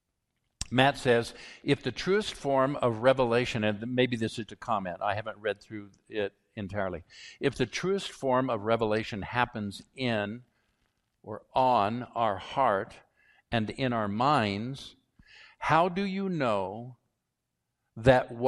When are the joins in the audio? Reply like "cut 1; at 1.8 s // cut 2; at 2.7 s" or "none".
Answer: cut 1; at 4.5 s